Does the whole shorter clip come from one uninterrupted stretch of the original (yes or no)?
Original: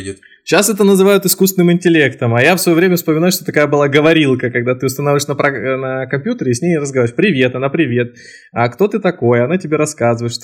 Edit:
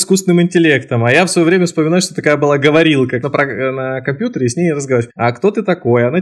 no